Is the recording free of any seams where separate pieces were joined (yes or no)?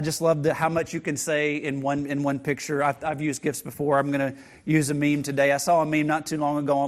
yes